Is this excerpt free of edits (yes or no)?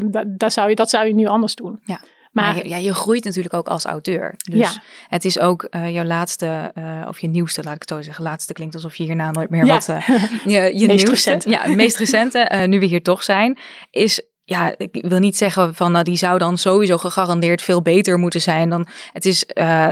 yes